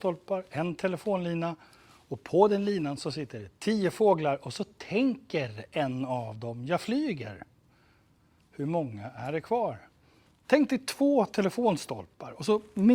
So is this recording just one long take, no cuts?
no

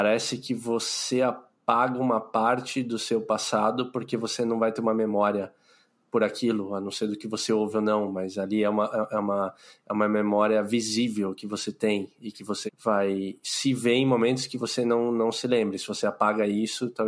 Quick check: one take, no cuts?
no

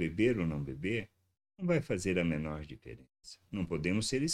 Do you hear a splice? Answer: no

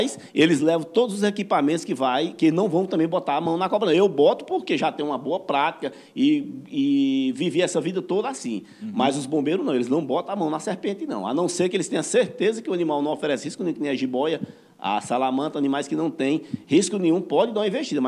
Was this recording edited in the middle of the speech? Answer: no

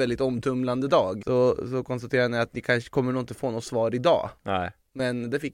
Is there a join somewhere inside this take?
yes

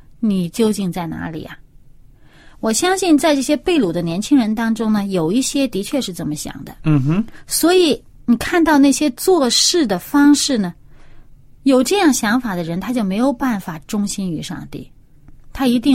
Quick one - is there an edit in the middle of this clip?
no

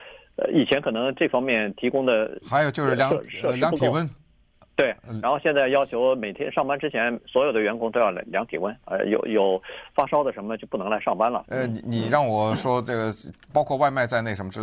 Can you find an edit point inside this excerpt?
yes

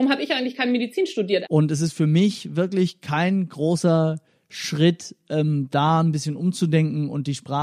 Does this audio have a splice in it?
yes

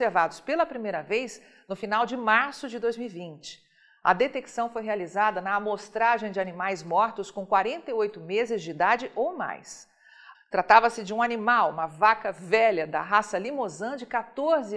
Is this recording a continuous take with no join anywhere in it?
no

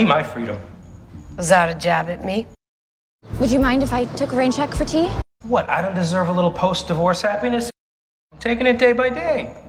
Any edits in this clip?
yes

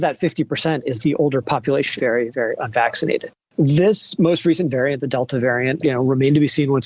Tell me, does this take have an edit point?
yes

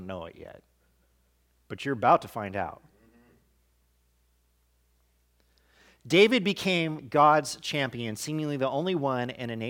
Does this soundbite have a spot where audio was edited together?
no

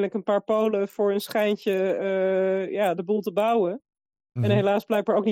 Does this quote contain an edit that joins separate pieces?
no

